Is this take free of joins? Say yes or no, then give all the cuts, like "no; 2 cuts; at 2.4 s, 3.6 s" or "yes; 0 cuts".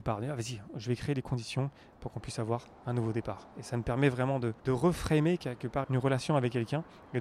no; 2 cuts; at 4.6 s, 5.8 s